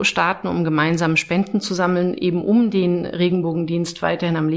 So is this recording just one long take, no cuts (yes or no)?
yes